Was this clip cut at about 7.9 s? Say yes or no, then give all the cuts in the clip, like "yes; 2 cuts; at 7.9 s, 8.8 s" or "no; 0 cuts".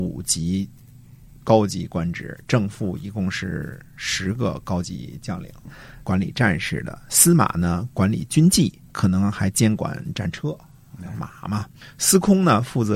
no; 1 cut; at 5.6 s